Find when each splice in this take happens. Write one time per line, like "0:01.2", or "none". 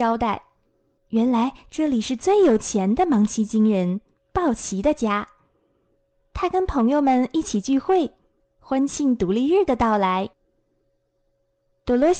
0:01.0